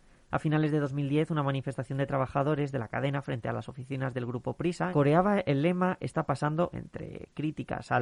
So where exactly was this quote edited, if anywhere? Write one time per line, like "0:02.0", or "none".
0:04.9
0:06.7